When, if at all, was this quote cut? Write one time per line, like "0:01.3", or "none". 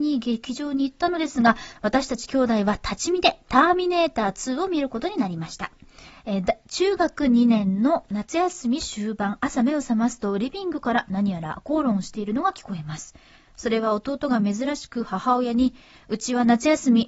0:01.8
0:06.1